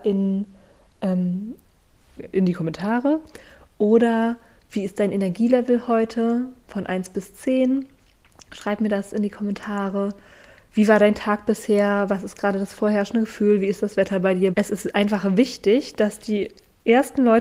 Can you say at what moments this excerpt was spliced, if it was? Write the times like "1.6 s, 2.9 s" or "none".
2.2 s, 14.5 s

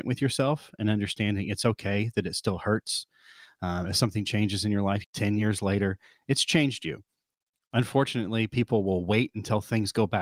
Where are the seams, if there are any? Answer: 5.0 s

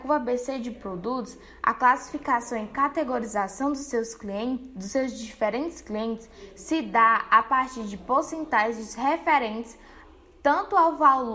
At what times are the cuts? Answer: none

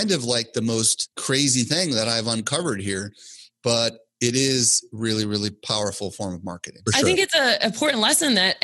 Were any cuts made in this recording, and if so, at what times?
6.9 s

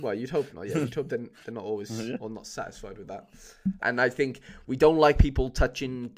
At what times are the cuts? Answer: 3.8 s

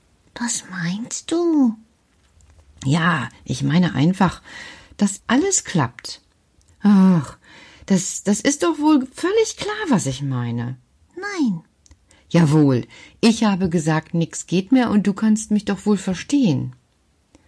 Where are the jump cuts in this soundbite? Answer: 5.2 s, 6.7 s

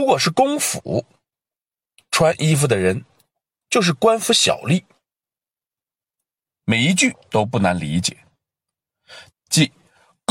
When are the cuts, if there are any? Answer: 6.5 s, 9.3 s

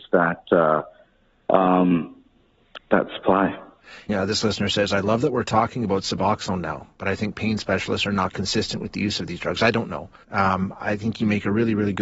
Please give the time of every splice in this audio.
4.1 s, 10.2 s

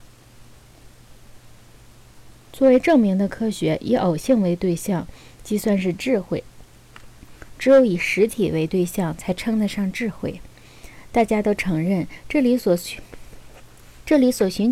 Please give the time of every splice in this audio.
7.6 s

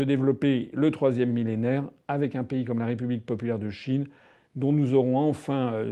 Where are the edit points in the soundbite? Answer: none

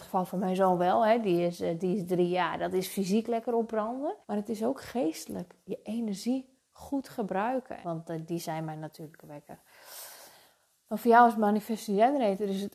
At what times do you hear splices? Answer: 4.2 s, 7.8 s

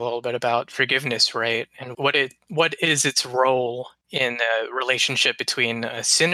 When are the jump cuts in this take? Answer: 1.9 s

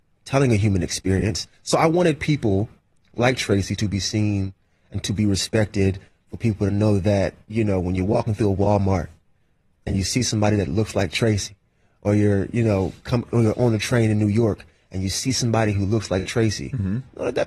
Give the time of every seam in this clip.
none

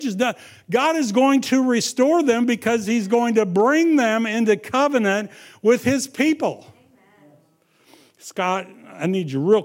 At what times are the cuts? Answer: none

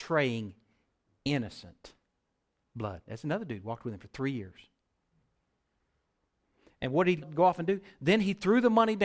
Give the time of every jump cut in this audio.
7.2 s

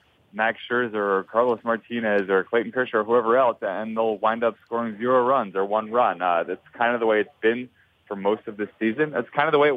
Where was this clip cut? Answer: none

